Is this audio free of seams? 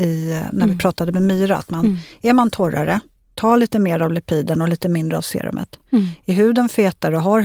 yes; 0 cuts

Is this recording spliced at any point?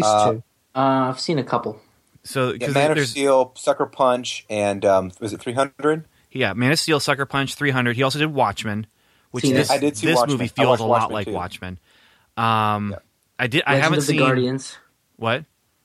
no; 0 cuts

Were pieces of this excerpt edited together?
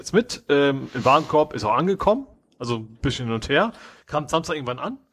yes; 1 cut; at 4.0 s

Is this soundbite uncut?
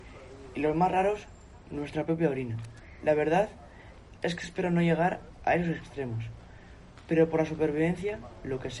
yes; 0 cuts

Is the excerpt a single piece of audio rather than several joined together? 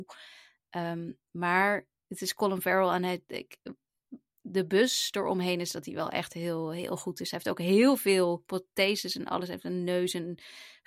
yes; 0 cuts

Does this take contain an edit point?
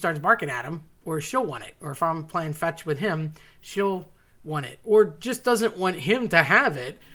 no; 0 cuts

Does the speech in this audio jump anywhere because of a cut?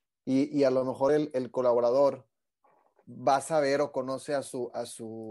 no; 0 cuts

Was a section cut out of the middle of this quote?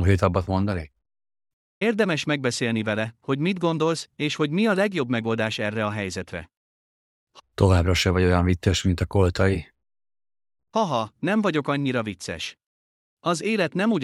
yes; 1 cut; at 11.2 s

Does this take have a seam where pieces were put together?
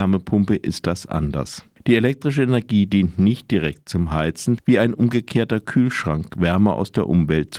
yes; 1 cut; at 4.6 s

